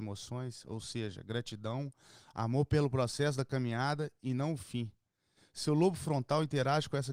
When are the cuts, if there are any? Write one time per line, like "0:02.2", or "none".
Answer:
none